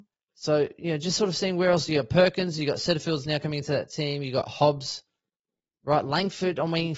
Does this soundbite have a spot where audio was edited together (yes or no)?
no